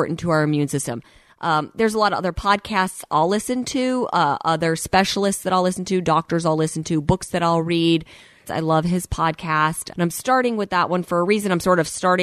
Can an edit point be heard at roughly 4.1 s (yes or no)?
no